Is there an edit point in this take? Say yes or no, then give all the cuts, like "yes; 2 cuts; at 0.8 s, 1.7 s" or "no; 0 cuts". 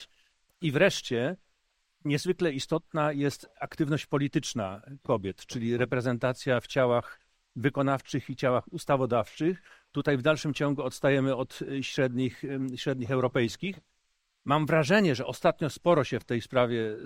no; 0 cuts